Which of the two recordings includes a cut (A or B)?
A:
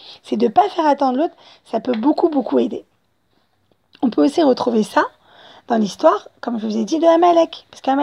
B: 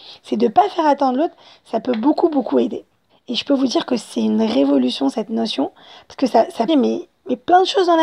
B